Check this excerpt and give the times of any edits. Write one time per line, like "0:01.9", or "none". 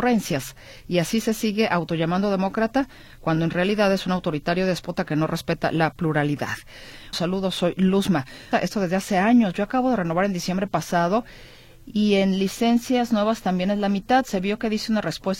0:07.1
0:08.5